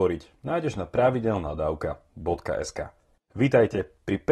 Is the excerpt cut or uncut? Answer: cut